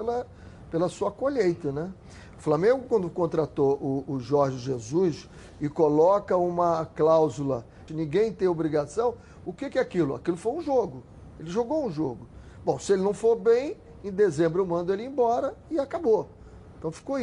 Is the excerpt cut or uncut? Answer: cut